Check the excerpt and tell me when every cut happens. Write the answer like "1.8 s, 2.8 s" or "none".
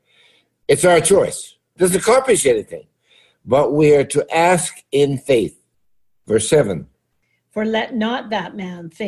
1.8 s